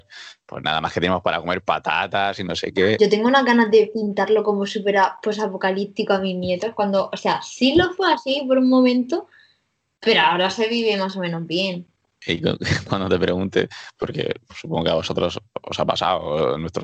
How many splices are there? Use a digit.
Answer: 1